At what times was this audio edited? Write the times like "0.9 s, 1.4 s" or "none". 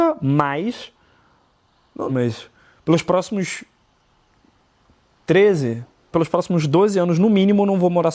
2.1 s, 6.1 s